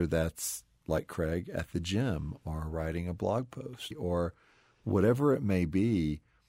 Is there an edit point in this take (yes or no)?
yes